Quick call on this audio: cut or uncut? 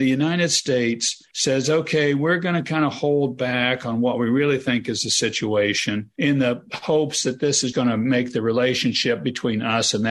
cut